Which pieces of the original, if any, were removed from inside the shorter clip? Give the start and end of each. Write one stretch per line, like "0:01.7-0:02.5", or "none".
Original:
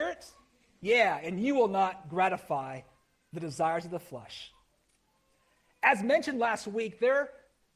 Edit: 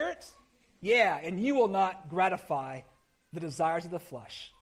none